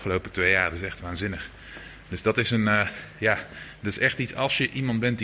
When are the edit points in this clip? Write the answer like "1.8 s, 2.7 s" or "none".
none